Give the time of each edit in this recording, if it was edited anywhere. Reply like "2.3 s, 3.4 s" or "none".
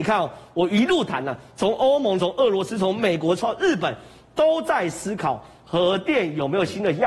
2.2 s